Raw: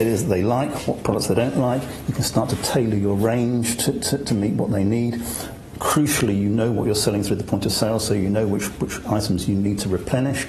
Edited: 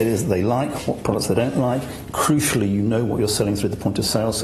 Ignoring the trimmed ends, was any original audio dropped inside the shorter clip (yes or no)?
yes